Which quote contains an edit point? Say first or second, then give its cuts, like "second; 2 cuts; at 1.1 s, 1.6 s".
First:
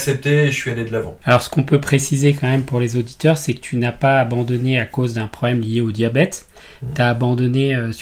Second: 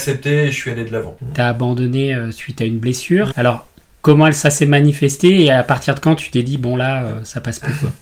second; 2 cuts; at 1.2 s, 3.3 s